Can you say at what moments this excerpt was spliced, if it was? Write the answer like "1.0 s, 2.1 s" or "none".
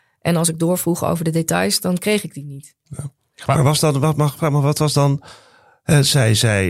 none

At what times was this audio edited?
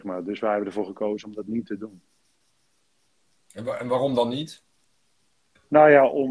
none

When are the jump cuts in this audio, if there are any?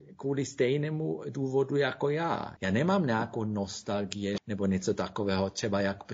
2.6 s, 4.4 s

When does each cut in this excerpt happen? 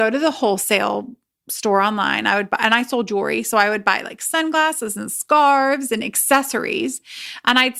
none

